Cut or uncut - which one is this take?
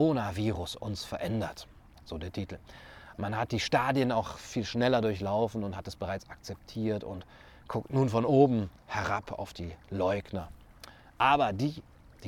cut